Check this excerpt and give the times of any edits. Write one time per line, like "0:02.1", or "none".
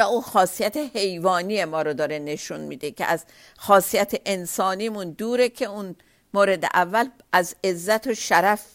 none